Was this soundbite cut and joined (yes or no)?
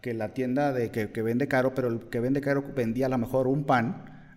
no